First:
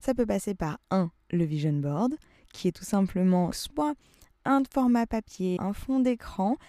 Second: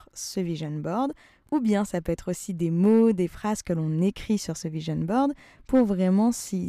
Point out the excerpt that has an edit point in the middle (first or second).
first